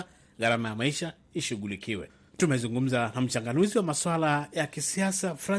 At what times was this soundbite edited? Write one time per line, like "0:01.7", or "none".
none